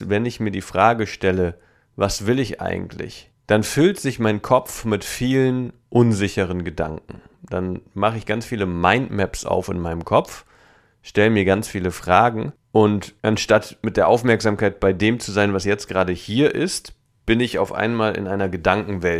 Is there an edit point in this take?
no; 0 cuts

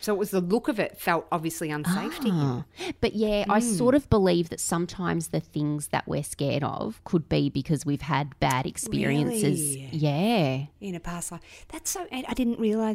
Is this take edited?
no; 0 cuts

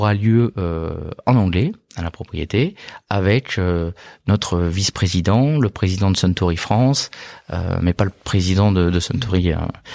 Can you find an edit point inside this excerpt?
no; 0 cuts

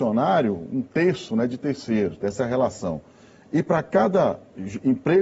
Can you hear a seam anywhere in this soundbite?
yes; 1 cut; at 2.2 s

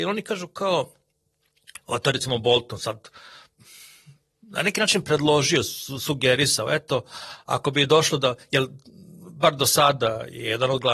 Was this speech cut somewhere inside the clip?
no; 0 cuts

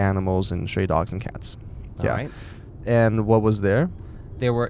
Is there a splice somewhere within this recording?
yes; 1 cut; at 2.8 s

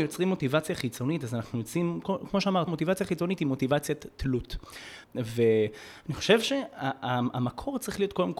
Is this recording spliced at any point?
yes; 2 cuts; at 2.7 s, 5.0 s

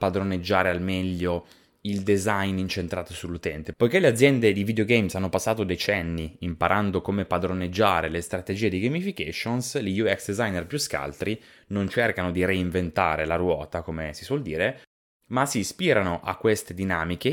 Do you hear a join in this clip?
yes; 1 cut; at 3.7 s

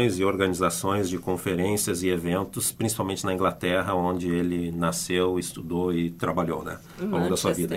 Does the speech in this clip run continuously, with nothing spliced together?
yes; 0 cuts

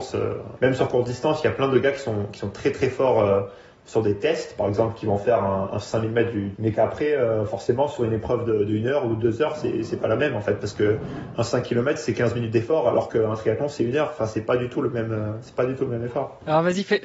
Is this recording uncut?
no; 1 cut; at 6.5 s

